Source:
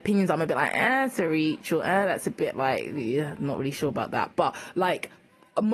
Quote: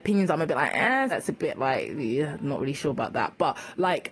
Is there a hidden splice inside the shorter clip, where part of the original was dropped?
yes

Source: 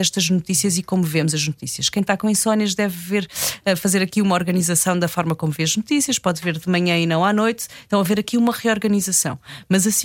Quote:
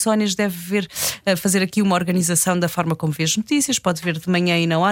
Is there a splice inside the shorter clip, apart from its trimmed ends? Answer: no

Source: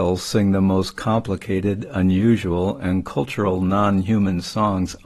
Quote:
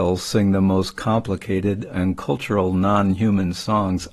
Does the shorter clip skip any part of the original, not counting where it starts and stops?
yes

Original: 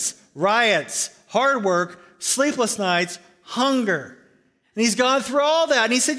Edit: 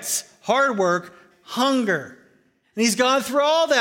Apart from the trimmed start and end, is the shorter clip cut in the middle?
yes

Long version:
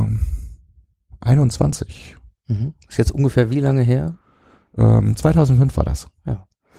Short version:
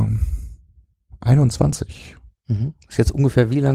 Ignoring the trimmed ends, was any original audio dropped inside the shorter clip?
no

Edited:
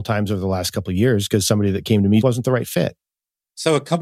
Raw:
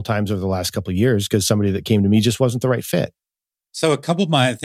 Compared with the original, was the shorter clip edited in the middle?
yes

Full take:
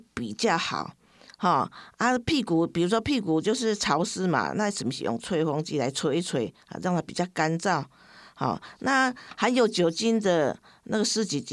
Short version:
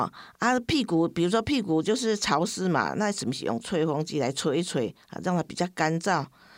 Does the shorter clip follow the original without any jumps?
yes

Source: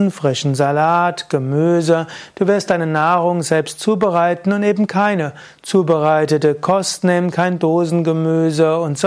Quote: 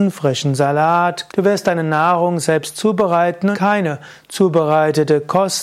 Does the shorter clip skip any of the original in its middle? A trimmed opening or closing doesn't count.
yes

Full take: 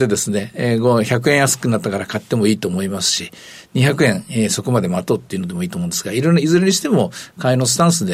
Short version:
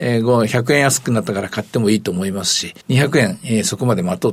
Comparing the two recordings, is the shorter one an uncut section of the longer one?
no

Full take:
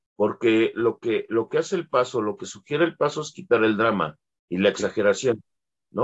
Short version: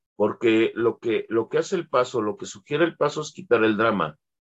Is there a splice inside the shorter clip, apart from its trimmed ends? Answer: no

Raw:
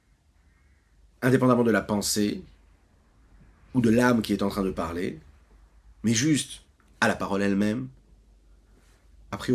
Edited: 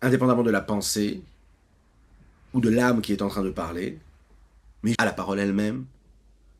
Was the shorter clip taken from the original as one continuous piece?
no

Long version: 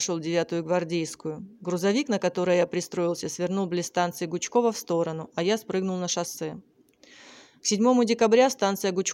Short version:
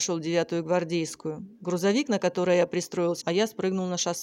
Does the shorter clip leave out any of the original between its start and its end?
yes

